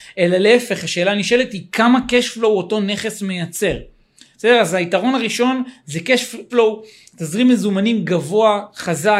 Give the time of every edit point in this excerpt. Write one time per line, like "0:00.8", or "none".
0:06.5